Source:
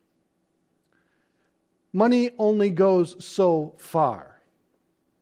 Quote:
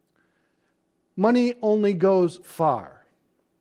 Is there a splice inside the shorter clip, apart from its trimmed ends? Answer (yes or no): yes